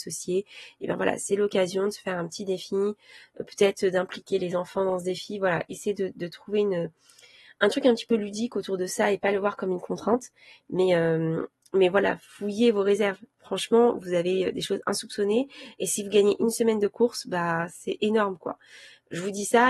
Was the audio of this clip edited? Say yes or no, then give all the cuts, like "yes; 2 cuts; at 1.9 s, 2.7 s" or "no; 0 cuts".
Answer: no; 0 cuts